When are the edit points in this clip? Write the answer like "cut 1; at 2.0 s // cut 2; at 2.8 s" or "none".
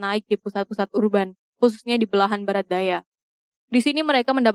none